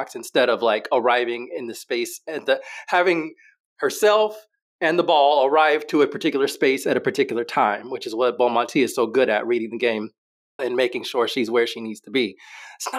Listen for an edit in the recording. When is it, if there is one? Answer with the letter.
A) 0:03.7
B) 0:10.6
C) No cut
B